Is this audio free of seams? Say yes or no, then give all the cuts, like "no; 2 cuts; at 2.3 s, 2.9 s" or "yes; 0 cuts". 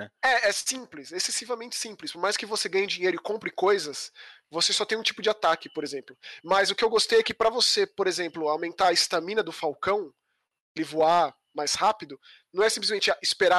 yes; 0 cuts